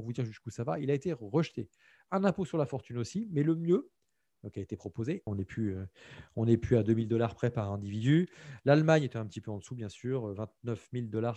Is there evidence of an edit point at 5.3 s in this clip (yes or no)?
yes